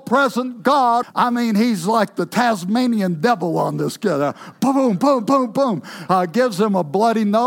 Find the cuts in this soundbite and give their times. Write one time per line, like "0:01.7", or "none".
0:01.0